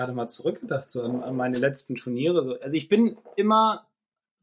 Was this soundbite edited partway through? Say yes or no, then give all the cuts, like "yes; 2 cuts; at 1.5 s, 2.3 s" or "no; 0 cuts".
no; 0 cuts